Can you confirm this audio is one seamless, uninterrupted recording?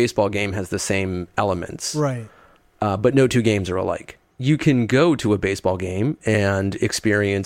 yes; 0 cuts

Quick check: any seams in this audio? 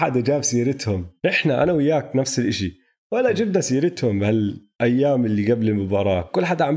yes; 2 cuts; at 1.2 s, 4.7 s

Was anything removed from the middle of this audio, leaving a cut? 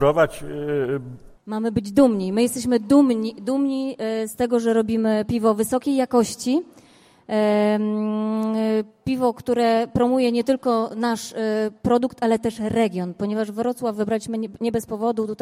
yes; 1 cut; at 1.4 s

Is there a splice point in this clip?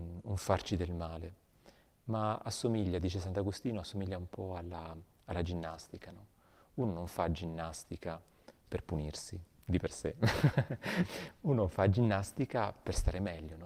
no; 0 cuts

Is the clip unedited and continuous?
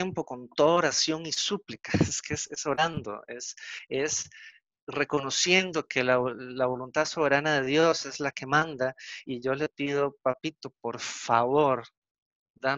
yes; 0 cuts

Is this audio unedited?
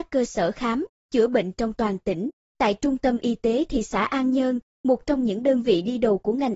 no; 1 cut; at 2.4 s

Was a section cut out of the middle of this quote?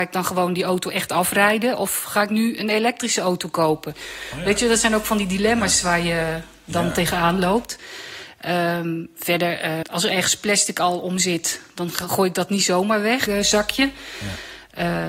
yes; 2 cuts; at 9.8 s, 13.3 s

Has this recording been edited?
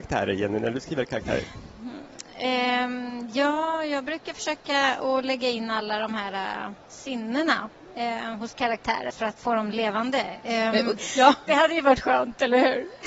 yes; 2 cuts; at 9.1 s, 11.0 s

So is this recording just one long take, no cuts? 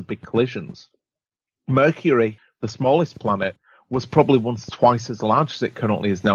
yes; 0 cuts

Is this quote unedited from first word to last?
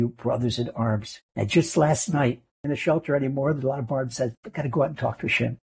no; 1 cut; at 2.5 s

